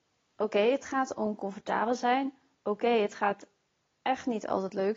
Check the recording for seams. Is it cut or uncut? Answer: uncut